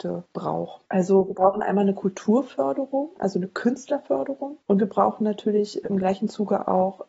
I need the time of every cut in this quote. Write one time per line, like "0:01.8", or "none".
0:03.2